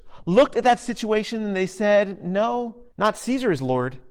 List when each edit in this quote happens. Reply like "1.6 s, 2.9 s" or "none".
2.9 s